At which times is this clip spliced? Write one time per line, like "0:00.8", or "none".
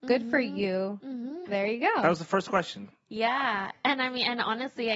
0:01.5